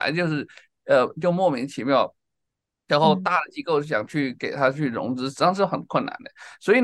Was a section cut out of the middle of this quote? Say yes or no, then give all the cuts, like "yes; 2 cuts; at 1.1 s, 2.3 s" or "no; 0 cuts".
no; 0 cuts